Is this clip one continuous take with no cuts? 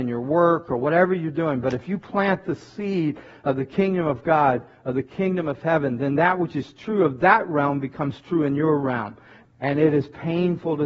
no; 1 cut; at 9.4 s

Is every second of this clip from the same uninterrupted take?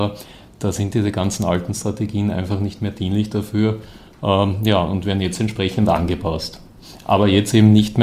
yes; 0 cuts

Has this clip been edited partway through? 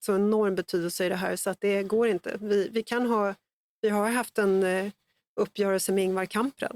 no; 0 cuts

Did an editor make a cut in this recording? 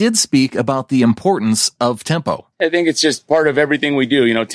yes; 1 cut; at 2.5 s

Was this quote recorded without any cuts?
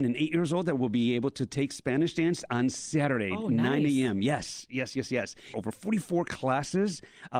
no; 1 cut; at 5.5 s

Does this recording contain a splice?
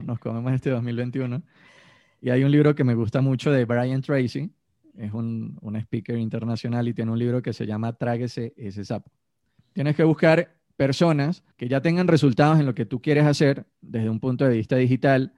yes; 2 cuts; at 9.6 s, 11.5 s

